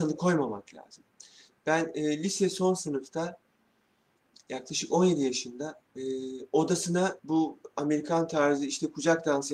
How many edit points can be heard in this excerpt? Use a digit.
2